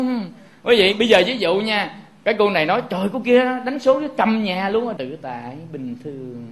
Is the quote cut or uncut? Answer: cut